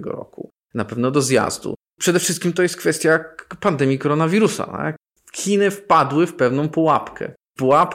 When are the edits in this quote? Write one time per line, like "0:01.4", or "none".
none